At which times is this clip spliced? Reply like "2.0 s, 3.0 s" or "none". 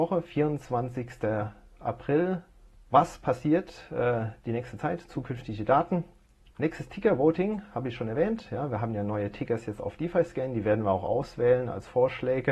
2.7 s, 6.5 s

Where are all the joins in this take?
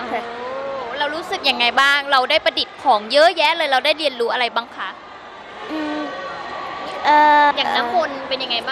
7.5 s

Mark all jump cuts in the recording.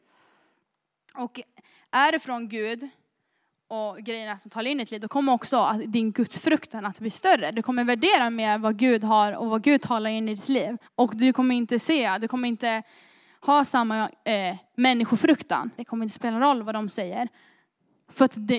10.8 s, 15.8 s

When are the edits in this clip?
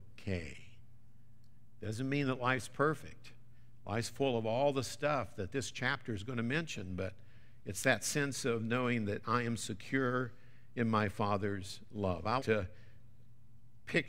12.4 s

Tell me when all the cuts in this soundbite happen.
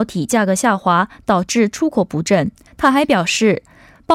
2.7 s

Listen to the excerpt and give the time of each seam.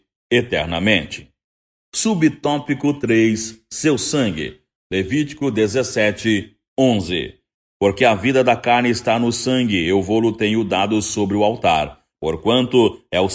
12.2 s

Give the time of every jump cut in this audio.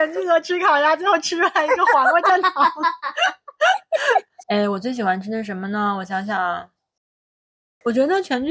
4.4 s

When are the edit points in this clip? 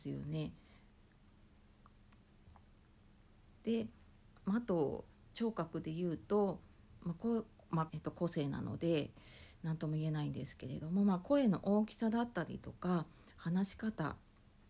3.6 s, 7.9 s

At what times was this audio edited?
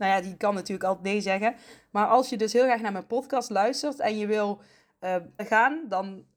5.4 s

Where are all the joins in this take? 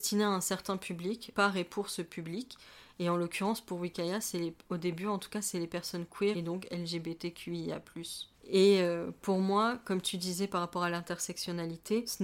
none

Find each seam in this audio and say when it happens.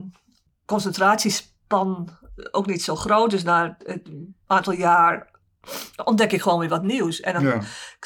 none

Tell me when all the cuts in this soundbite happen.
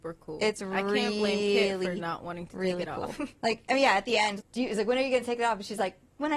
4.4 s

